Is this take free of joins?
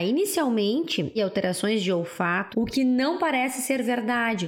no; 2 cuts; at 1.2 s, 2.5 s

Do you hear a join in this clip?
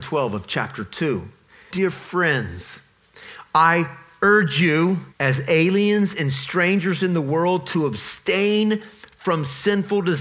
yes; 2 cuts; at 1.7 s, 5.1 s

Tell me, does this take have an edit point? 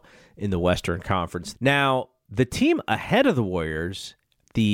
yes; 1 cut; at 1.5 s

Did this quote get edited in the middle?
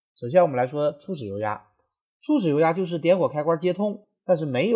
no; 0 cuts

